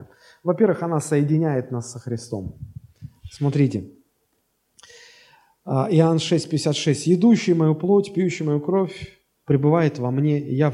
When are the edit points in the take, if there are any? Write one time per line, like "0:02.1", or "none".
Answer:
none